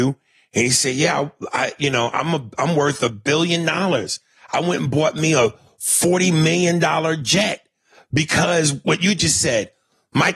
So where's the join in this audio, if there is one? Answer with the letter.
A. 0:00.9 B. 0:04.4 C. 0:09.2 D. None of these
D